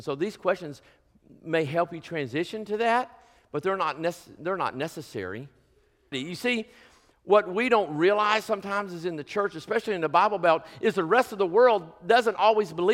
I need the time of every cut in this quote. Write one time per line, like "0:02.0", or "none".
0:06.1

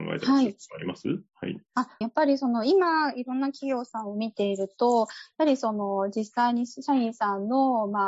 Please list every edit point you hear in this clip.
0:02.0

